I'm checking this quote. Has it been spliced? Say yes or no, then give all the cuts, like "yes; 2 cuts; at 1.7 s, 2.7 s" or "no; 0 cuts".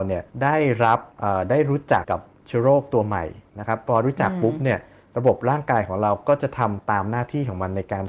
yes; 1 cut; at 2.0 s